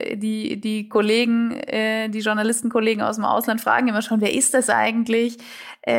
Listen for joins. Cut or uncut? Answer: uncut